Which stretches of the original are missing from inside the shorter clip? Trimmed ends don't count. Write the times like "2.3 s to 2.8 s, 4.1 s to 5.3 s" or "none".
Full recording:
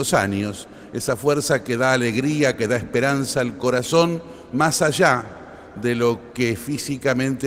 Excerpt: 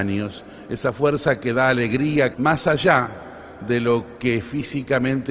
2.6 s to 4.5 s